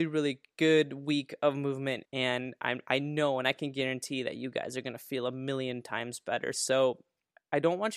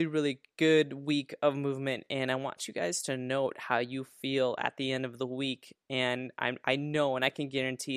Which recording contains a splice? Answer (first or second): first